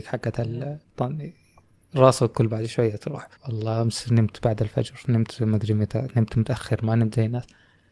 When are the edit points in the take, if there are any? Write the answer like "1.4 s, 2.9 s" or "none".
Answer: 0.9 s, 3.4 s